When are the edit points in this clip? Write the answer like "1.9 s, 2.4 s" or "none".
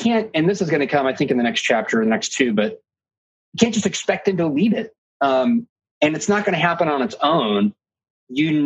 5.0 s

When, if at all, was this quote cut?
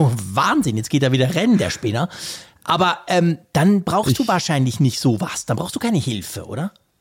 none

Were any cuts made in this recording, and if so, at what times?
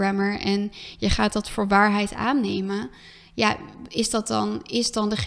none

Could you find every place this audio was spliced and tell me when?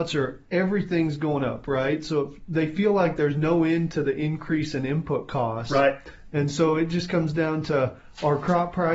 none

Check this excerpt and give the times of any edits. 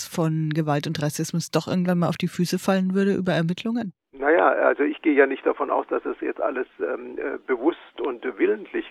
none

